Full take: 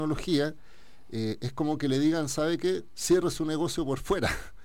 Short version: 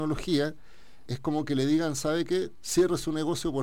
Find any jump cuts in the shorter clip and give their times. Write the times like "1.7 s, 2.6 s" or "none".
1.1 s